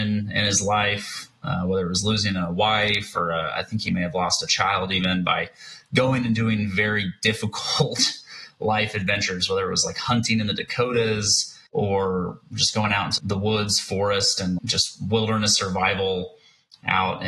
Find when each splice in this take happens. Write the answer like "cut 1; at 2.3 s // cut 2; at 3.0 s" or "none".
cut 1; at 11.7 s // cut 2; at 13.2 s // cut 3; at 14.6 s